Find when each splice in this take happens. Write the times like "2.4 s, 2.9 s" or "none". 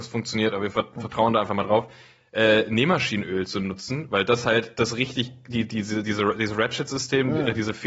none